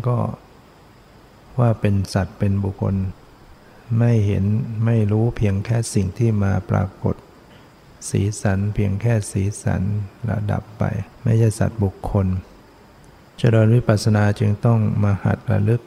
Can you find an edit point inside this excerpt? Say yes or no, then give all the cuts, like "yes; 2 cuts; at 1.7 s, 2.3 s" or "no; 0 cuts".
yes; 2 cuts; at 2.8 s, 11.1 s